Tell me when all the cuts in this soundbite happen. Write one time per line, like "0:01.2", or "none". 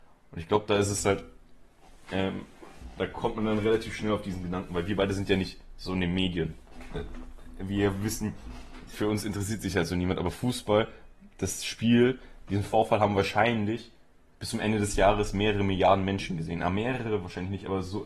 none